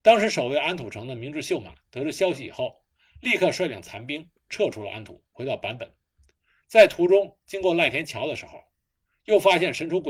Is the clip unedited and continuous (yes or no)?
yes